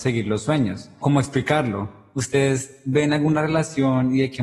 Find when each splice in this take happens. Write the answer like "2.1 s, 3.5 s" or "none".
1.0 s